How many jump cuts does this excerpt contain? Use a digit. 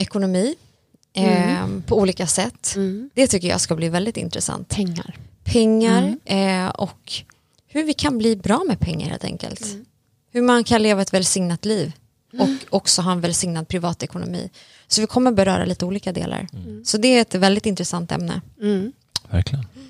0